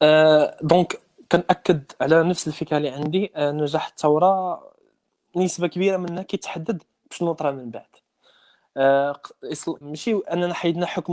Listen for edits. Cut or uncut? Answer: cut